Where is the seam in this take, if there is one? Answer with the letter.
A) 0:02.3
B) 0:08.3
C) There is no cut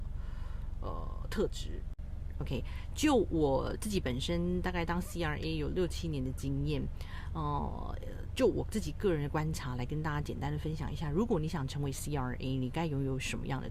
A